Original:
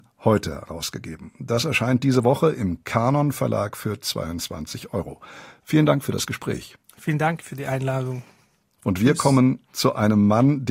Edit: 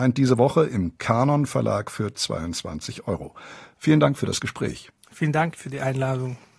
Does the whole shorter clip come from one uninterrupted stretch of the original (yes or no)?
yes